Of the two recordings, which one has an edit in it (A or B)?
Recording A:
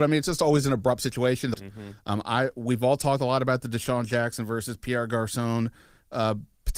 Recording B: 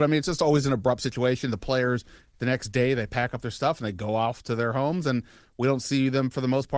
A